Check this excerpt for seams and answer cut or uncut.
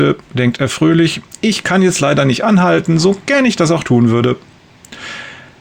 uncut